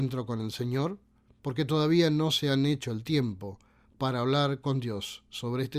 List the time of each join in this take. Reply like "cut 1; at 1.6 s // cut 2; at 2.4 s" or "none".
cut 1; at 1.4 s